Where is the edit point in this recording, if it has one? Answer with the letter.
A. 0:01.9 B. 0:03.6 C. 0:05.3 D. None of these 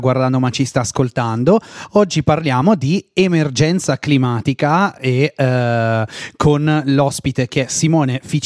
D